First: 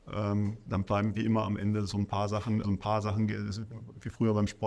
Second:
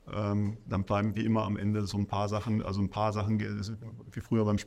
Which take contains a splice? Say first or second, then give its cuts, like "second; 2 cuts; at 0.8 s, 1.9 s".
first; 1 cut; at 2.6 s